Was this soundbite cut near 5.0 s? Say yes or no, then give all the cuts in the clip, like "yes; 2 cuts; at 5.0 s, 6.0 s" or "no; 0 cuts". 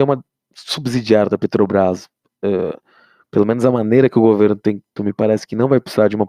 yes; 1 cut; at 5.0 s